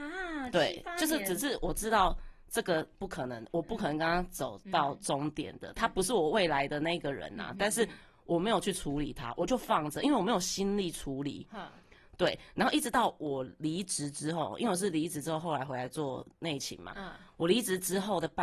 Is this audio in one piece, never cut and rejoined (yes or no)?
yes